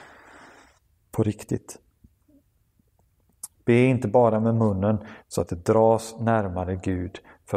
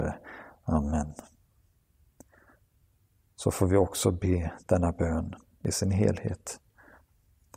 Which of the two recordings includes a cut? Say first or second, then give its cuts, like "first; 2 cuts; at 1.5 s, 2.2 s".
first; 2 cuts; at 3.5 s, 5.2 s